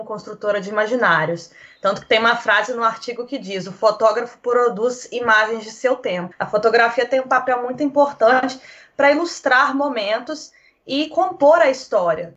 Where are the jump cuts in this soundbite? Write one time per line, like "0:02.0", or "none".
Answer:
0:06.3